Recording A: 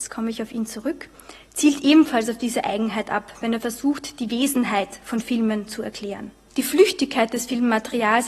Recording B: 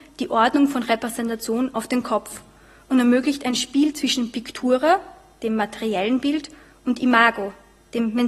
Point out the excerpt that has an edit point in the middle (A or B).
A